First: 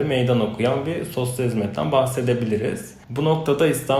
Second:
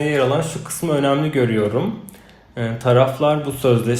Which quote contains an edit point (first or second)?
first